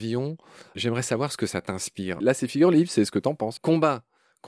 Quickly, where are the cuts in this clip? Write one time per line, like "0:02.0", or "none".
0:02.2
0:03.6